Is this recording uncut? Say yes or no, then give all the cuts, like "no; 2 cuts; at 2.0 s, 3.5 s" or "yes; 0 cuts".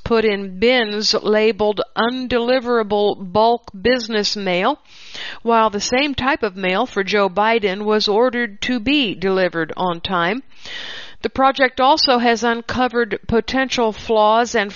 yes; 0 cuts